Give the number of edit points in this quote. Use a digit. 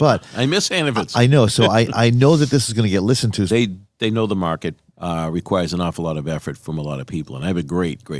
2